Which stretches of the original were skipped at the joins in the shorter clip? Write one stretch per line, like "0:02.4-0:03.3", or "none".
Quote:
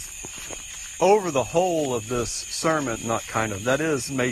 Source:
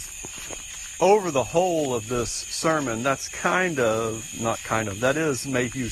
0:03.0-0:04.3